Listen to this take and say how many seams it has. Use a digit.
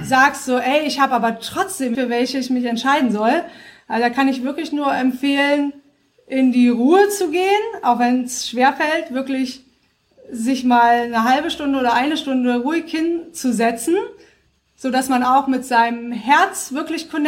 1